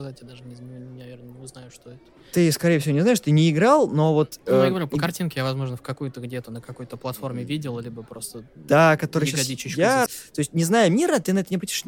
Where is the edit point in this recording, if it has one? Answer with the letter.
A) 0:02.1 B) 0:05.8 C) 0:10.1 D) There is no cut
C